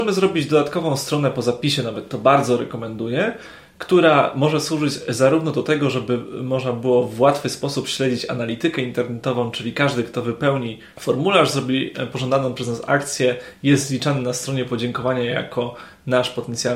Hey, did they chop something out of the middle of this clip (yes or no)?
no